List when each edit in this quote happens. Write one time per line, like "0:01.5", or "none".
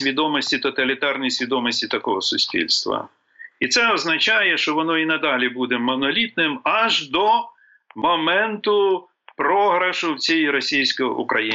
none

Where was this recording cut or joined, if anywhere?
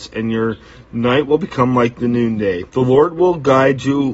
0:02.7

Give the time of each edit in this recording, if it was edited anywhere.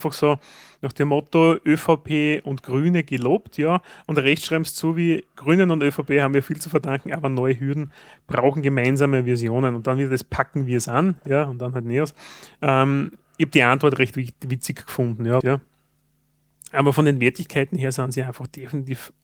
0:15.4

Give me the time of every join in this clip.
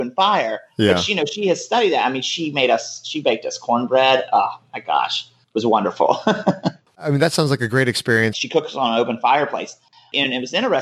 0:08.3

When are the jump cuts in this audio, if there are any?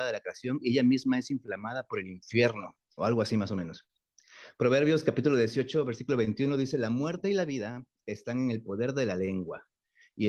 0:03.0

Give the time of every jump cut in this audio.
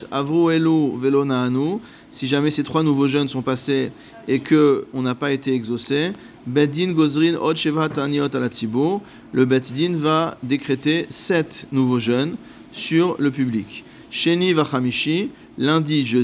none

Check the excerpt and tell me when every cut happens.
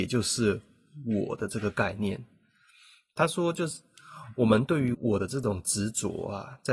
0:04.9

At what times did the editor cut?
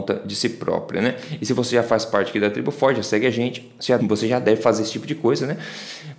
0:04.0

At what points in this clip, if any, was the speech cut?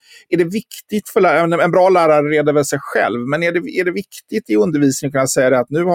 none

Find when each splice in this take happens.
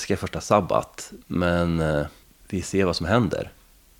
0:01.2

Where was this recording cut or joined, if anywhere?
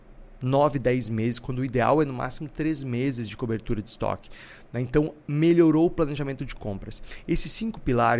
0:05.2

